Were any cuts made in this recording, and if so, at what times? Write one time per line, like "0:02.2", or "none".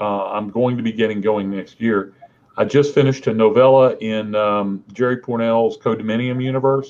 none